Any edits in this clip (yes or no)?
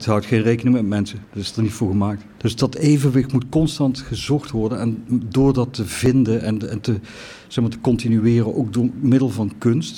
yes